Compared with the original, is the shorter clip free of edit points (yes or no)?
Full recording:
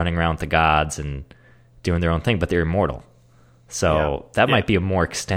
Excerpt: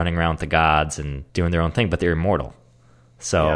no